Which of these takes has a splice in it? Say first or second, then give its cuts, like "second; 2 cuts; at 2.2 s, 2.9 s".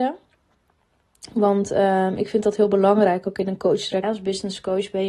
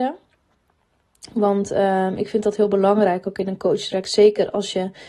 first; 1 cut; at 4.0 s